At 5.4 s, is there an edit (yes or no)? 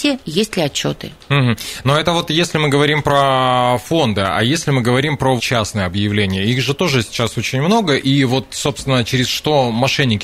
yes